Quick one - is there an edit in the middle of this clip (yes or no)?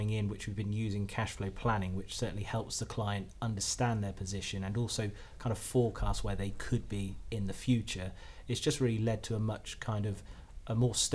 no